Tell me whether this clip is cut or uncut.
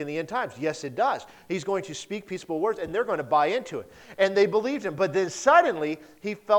uncut